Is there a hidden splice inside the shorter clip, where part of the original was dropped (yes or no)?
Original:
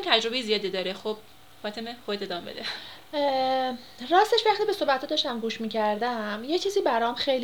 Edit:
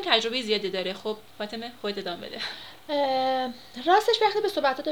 yes